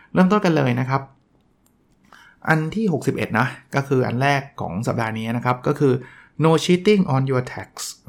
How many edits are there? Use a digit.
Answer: 0